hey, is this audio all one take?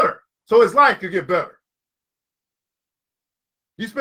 yes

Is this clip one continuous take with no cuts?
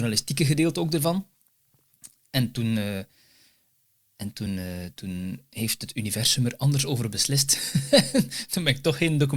yes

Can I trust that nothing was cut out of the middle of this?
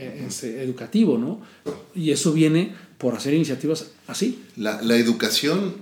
no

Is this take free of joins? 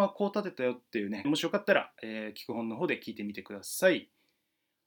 no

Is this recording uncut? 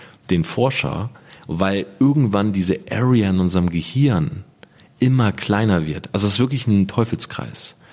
yes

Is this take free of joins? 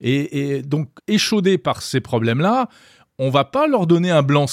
no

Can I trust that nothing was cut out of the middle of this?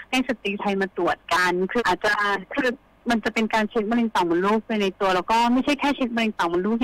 no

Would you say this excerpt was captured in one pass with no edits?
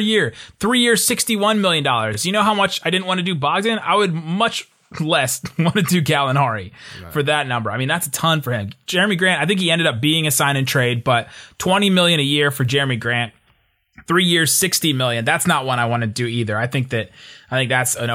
yes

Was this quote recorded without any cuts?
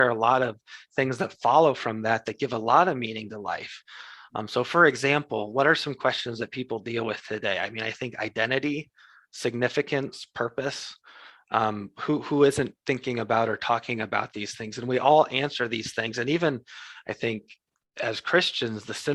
yes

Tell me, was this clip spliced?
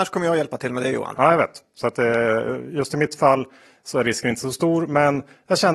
no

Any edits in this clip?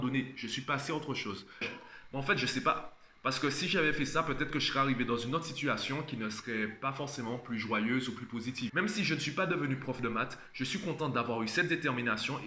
yes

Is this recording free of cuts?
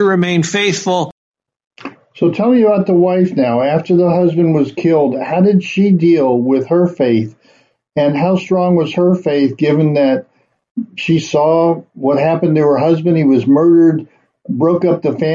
yes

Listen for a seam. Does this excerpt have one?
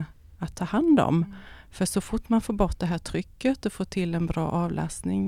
no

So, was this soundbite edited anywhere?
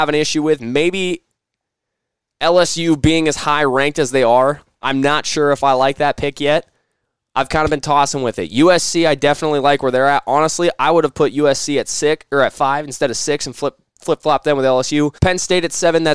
yes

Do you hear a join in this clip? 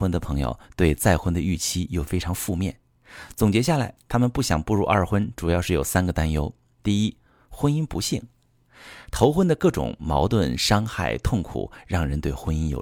no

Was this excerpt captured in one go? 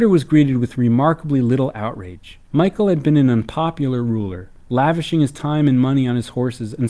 no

